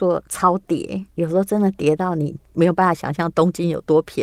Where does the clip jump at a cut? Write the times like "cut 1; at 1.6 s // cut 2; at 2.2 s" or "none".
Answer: cut 1; at 1.1 s

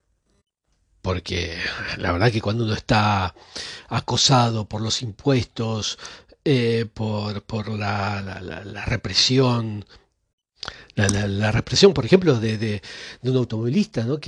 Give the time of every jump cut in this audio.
none

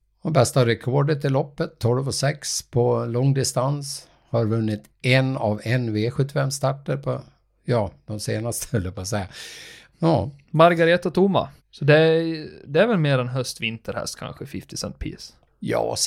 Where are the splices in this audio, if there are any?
cut 1; at 9.9 s // cut 2; at 11.6 s

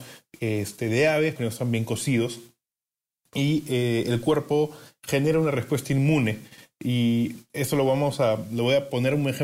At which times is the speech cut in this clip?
cut 1; at 1.4 s

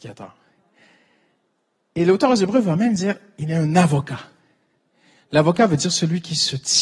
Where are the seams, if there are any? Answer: none

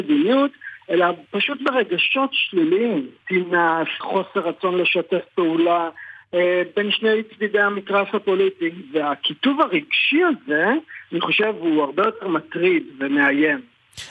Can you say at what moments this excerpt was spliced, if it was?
cut 1; at 4.0 s

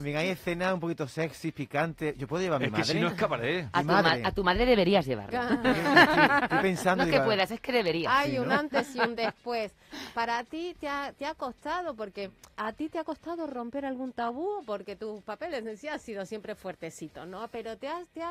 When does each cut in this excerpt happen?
cut 1; at 12.5 s

